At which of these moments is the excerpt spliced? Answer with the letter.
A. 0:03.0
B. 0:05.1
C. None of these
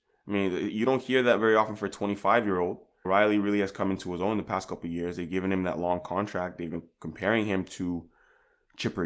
A